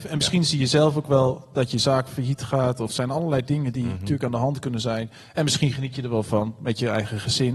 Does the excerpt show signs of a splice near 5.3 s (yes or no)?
no